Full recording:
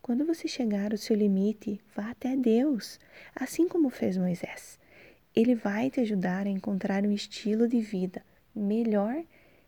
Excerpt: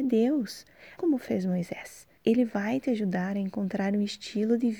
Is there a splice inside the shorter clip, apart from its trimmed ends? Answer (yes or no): yes